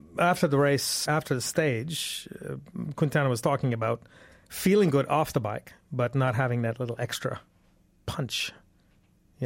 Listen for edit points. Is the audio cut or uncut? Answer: cut